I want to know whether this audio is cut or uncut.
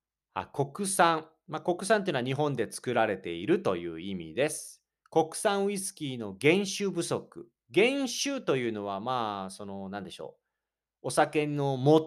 uncut